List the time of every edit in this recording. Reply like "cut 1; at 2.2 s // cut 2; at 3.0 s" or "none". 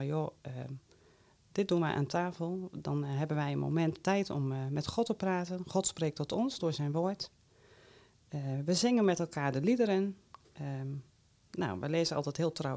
none